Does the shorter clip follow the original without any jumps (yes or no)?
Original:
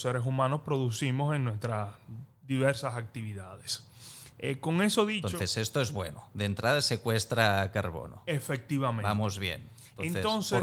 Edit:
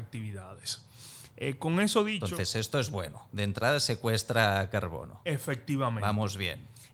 yes